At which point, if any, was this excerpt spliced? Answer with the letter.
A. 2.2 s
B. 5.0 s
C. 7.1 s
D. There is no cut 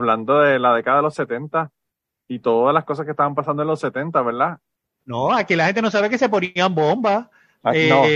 B